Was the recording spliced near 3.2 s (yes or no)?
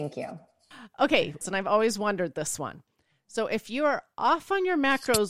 no